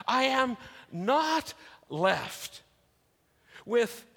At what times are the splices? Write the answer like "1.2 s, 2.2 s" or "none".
none